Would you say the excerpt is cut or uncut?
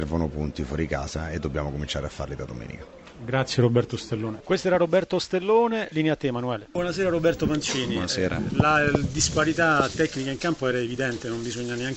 cut